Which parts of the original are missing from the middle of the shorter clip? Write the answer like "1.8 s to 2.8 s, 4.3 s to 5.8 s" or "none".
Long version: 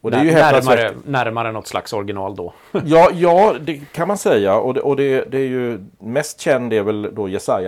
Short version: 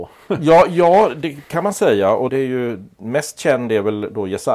4.7 s to 5.3 s